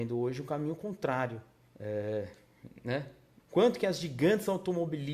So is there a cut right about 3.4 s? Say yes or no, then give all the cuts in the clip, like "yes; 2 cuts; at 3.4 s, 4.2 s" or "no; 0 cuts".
yes; 2 cuts; at 1.7 s, 3.4 s